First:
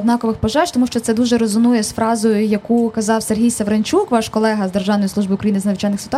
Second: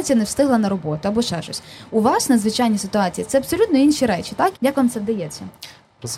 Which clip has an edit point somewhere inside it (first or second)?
second